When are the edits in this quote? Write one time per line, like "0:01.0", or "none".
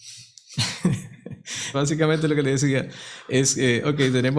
0:01.7